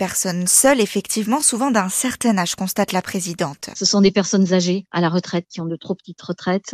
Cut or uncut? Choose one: uncut